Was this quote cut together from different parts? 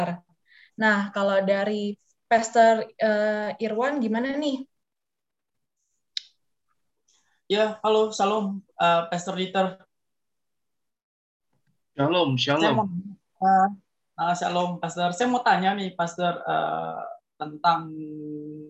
no; 0 cuts

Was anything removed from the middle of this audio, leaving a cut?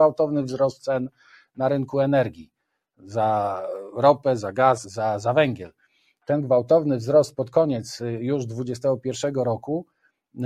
yes; 1 cut; at 4.8 s

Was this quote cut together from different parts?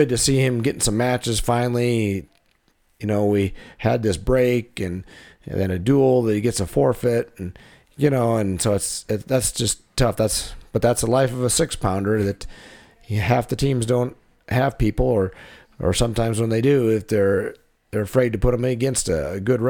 no; 0 cuts

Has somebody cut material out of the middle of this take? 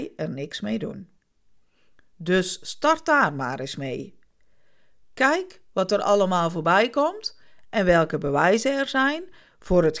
no; 0 cuts

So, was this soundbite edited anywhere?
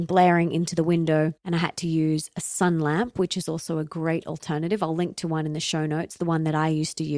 no; 0 cuts

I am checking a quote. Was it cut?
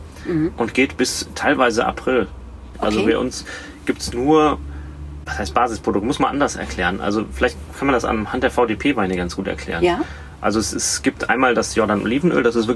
yes; 1 cut; at 2.7 s

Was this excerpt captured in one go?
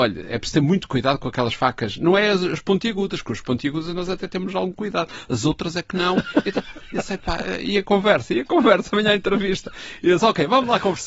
yes; 0 cuts

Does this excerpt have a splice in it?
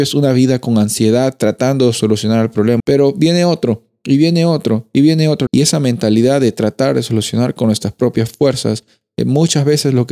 yes; 2 cuts; at 2.8 s, 5.5 s

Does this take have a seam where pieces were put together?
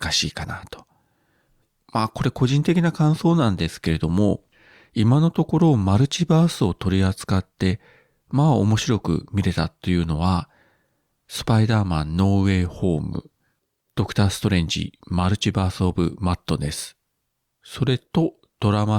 no; 0 cuts

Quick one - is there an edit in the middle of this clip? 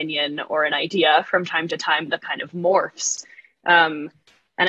yes; 1 cut; at 2.2 s

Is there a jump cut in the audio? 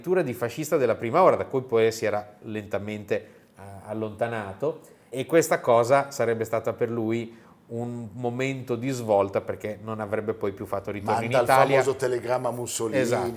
yes; 1 cut; at 5.1 s

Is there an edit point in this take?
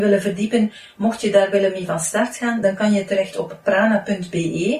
no; 0 cuts

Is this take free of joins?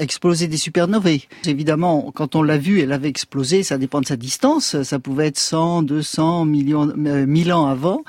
no; 1 cut; at 1.4 s

